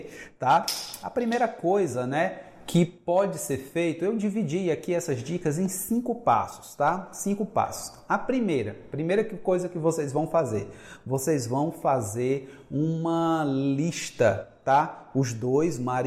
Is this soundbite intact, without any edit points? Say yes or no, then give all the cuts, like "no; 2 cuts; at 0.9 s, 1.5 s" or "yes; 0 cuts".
yes; 0 cuts